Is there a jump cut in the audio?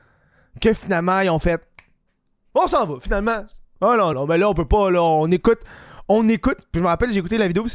yes; 1 cut; at 4.1 s

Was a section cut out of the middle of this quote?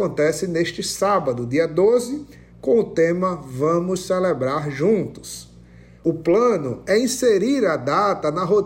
yes; 1 cut; at 5.9 s

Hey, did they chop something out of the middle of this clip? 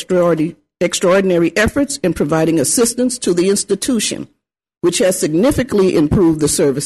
no; 0 cuts

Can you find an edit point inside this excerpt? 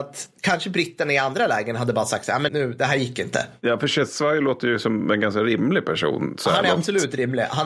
yes; 1 cut; at 2.5 s

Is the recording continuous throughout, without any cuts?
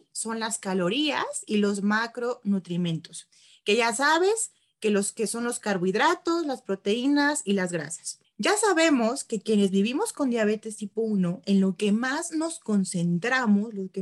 no; 1 cut; at 8.2 s

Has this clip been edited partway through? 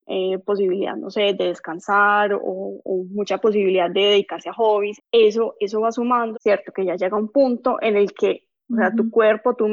yes; 2 cuts; at 5.0 s, 6.3 s

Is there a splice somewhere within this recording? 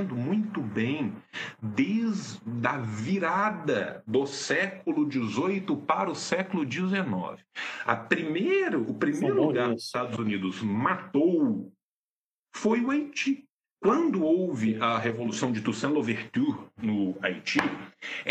no; 0 cuts

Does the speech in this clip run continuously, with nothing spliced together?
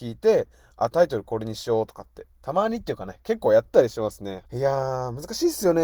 no; 2 cuts; at 2.3 s, 4.4 s

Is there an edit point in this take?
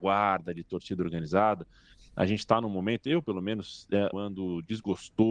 yes; 1 cut; at 4.1 s

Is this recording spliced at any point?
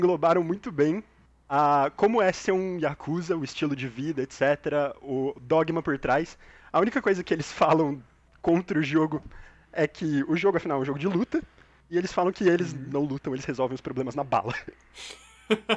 no; 0 cuts

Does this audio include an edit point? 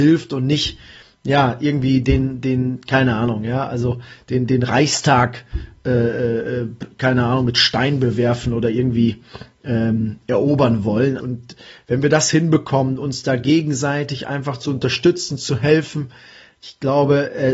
yes; 1 cut; at 11.2 s

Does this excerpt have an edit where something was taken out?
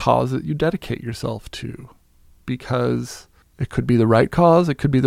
no; 0 cuts

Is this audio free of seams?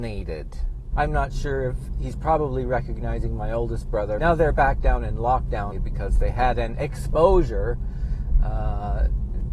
no; 3 cuts; at 0.9 s, 4.2 s, 5.7 s

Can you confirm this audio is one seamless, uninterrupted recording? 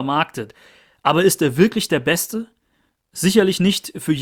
yes; 0 cuts

